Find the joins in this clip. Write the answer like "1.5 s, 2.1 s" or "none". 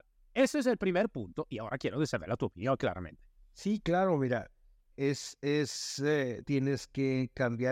4.9 s, 6.4 s